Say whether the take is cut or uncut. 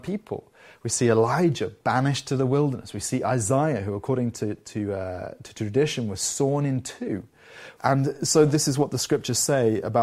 cut